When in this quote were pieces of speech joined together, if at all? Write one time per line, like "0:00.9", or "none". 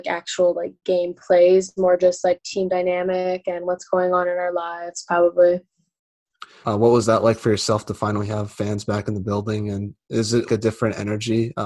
0:06.6
0:10.5